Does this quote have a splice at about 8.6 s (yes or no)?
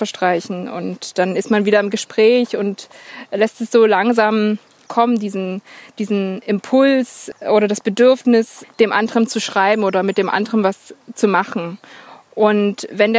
yes